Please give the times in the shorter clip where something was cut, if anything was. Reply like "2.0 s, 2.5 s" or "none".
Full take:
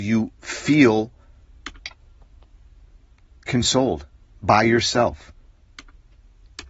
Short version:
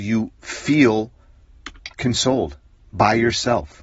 1.9 s